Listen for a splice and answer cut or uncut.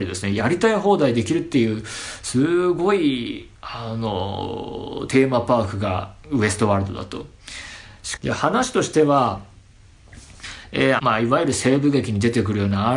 cut